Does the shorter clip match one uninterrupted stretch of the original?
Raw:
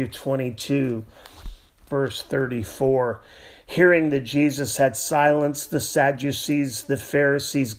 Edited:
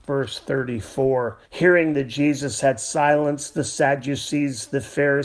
no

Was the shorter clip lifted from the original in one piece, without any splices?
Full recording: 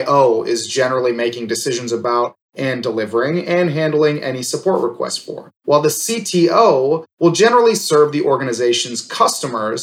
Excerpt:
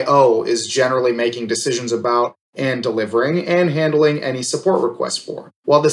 yes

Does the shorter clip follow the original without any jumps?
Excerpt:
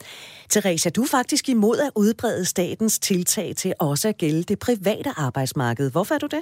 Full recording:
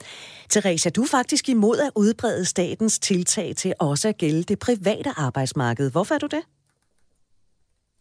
yes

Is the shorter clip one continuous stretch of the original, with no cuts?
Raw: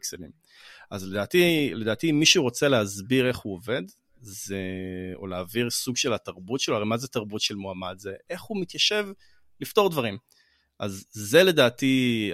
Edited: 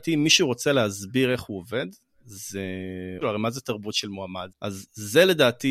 no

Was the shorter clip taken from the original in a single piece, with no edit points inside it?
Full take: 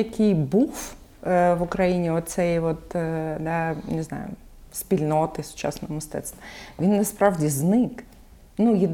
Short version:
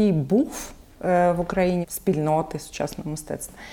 no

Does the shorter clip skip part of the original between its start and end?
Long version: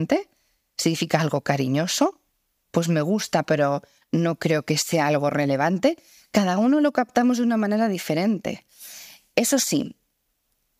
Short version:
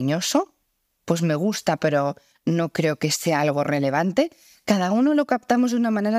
no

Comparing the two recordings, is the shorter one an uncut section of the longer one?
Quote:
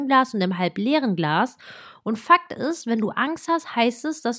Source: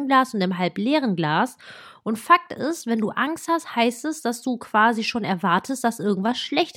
yes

